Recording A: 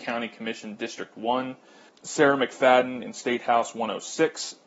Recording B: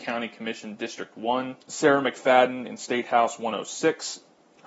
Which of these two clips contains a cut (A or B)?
B